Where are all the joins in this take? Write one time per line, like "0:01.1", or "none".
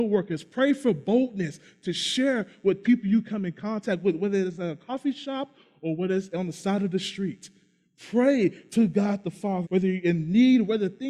0:09.6